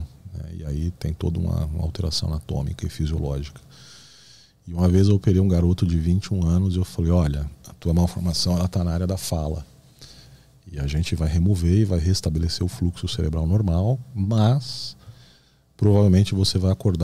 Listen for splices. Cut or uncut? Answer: uncut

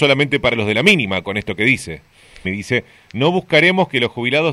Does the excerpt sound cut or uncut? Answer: cut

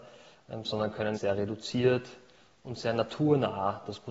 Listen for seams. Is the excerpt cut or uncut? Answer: cut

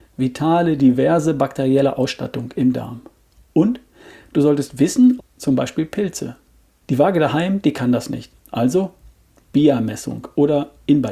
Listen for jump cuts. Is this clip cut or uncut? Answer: cut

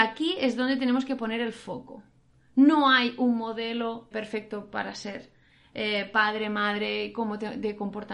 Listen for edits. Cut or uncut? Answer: cut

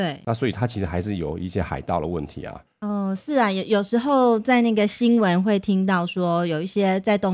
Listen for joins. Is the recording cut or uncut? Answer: uncut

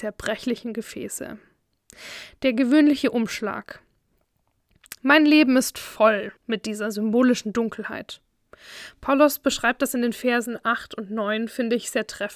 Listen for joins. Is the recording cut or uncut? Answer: cut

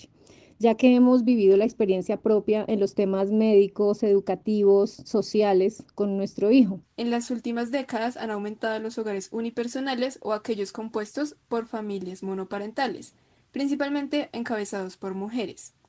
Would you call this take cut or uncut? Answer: cut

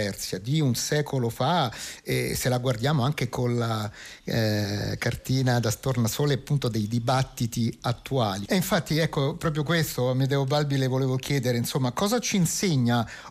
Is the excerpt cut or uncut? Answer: cut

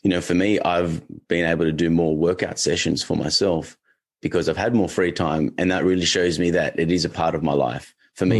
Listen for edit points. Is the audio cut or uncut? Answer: uncut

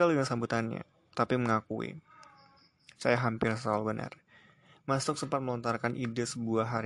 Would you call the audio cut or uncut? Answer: uncut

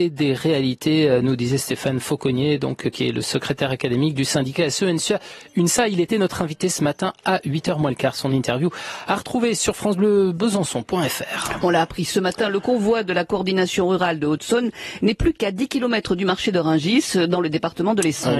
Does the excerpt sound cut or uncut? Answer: uncut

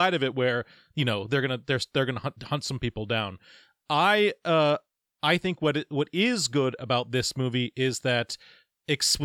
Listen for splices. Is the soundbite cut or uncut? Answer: uncut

